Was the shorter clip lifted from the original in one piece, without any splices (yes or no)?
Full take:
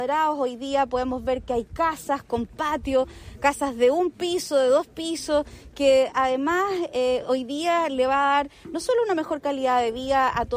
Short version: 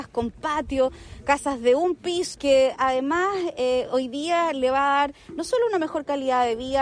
no